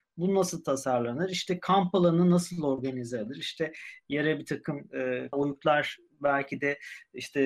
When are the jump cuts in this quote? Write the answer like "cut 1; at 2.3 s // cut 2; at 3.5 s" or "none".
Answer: cut 1; at 5.3 s

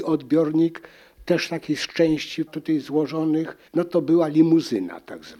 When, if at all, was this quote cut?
cut 1; at 2.5 s // cut 2; at 3.7 s

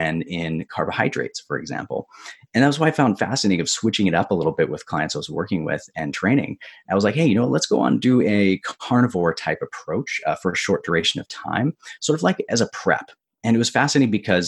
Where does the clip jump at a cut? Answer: none

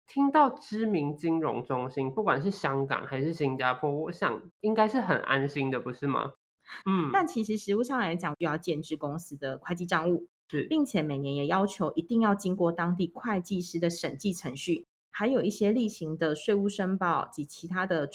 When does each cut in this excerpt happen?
cut 1; at 6.8 s // cut 2; at 8.3 s

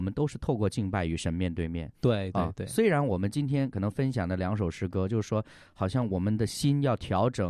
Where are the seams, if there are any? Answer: cut 1; at 1.9 s

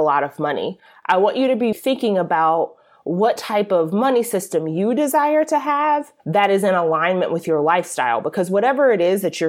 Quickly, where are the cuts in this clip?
cut 1; at 1.7 s // cut 2; at 6.2 s

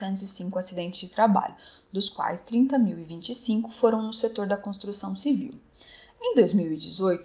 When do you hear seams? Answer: none

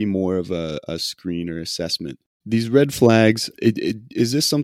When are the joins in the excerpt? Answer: cut 1; at 2.4 s // cut 2; at 3.5 s

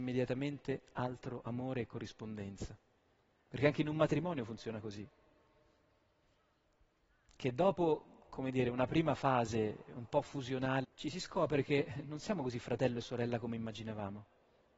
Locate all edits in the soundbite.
cut 1; at 3.3 s // cut 2; at 10.8 s

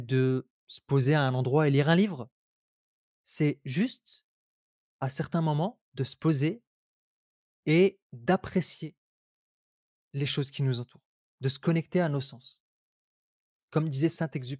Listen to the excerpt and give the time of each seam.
none

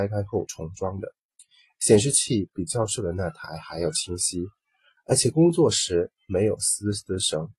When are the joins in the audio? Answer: none

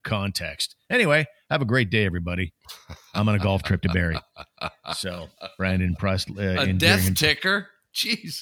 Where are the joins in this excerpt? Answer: none

